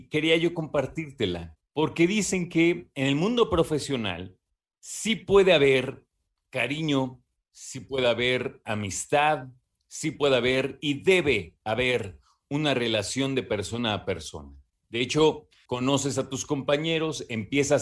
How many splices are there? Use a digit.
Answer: 1